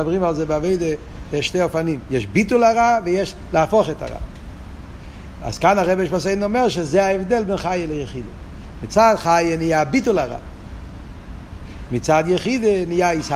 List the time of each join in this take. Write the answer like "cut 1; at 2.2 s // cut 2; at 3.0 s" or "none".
none